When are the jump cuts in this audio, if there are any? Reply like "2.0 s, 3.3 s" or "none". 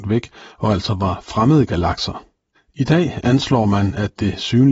2.5 s